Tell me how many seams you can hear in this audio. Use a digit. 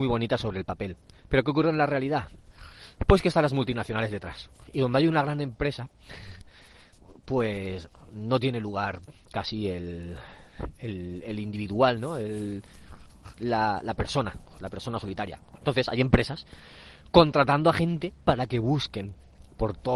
0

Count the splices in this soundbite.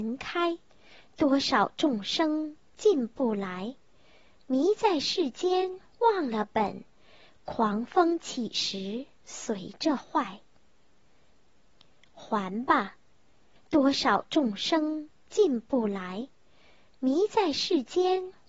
1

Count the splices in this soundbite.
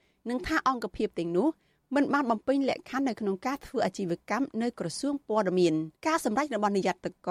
1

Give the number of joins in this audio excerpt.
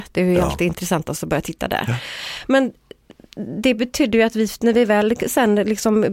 0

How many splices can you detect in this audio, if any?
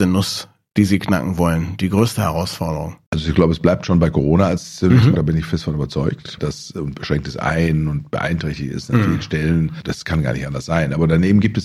2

